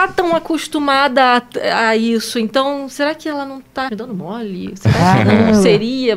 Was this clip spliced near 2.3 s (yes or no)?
no